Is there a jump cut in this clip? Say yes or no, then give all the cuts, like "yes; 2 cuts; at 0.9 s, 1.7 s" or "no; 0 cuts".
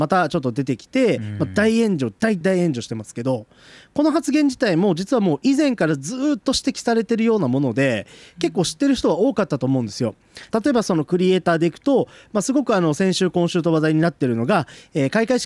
yes; 2 cuts; at 2.4 s, 10.5 s